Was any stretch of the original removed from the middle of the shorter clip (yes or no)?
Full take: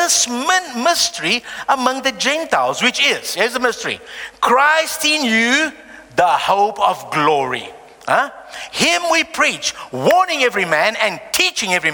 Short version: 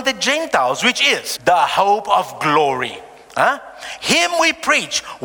yes